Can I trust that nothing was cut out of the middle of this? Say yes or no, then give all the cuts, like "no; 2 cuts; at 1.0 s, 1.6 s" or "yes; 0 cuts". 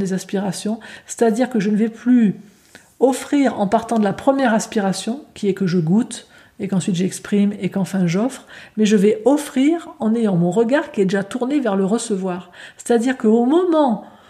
yes; 0 cuts